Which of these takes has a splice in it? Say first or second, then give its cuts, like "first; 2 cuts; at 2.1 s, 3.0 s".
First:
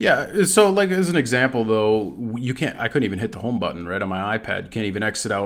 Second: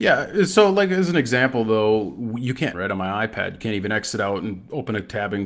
second; 1 cut; at 2.7 s